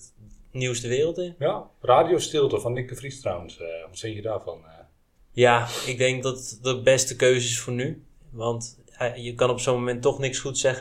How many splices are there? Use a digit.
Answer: 1